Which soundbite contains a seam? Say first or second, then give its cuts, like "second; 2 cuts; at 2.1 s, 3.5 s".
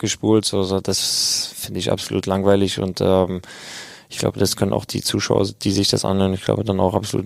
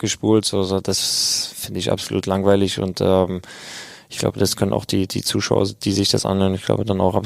first; 1 cut; at 4.9 s